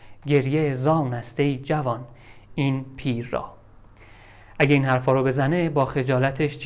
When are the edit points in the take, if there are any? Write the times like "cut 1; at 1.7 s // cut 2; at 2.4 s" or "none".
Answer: none